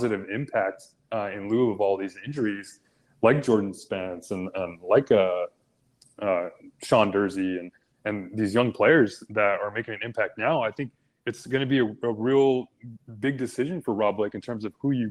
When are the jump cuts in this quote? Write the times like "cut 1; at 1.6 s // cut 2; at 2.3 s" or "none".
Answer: none